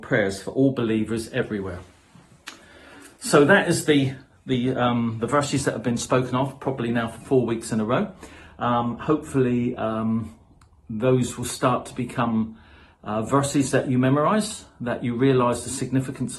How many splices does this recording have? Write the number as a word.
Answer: zero